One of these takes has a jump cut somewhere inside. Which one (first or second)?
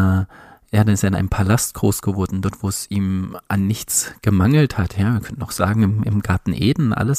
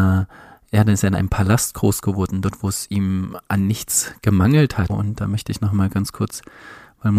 second